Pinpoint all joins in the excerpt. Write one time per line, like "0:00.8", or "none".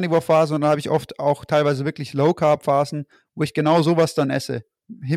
none